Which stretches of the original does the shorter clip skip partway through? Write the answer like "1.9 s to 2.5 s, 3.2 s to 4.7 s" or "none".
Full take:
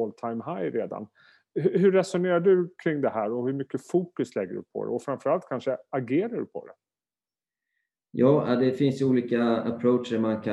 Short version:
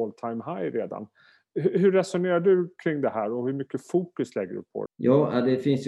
4.9 s to 8.0 s

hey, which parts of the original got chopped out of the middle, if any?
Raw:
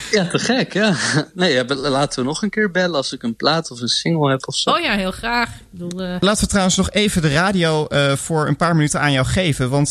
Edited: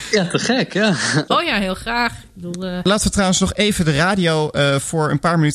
1.3 s to 4.6 s

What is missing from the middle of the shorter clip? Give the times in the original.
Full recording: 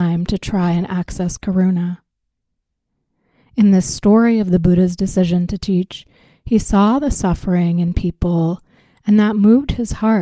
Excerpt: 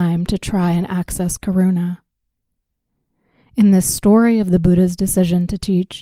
none

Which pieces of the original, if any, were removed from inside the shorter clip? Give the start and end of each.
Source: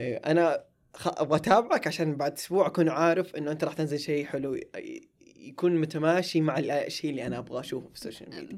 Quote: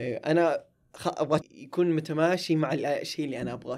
1.4 s to 5.3 s

